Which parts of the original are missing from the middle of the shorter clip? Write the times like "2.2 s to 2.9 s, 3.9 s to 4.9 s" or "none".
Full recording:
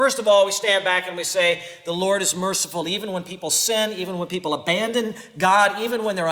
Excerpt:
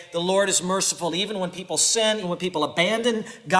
3.9 s to 4.1 s